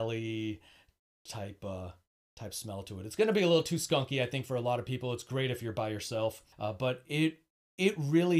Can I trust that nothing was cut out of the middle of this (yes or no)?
no